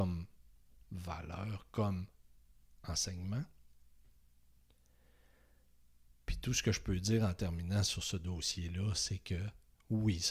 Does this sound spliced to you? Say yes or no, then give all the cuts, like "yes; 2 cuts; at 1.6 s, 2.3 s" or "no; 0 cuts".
no; 0 cuts